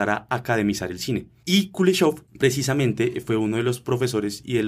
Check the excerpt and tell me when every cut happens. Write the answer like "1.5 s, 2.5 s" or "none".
1.4 s